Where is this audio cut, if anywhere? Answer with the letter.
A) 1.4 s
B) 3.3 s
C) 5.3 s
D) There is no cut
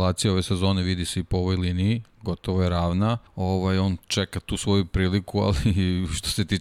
B